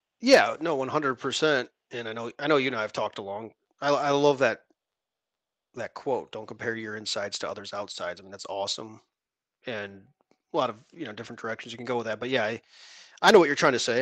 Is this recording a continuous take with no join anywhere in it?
yes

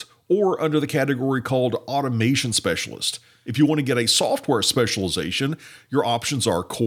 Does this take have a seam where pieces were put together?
no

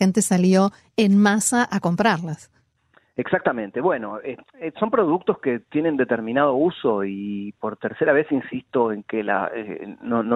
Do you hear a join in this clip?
no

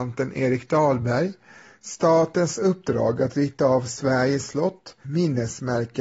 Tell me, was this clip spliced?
yes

